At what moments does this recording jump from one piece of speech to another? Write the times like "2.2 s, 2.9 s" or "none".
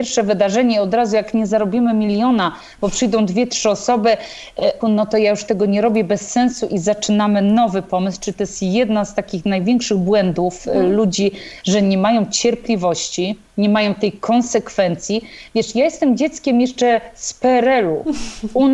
4.8 s